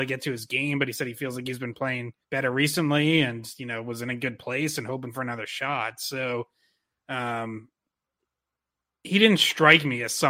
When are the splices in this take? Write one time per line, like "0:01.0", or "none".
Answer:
0:02.2